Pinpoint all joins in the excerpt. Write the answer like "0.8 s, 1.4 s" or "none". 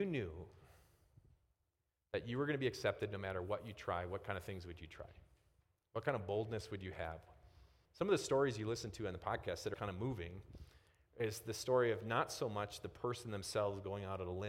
7.8 s, 9.7 s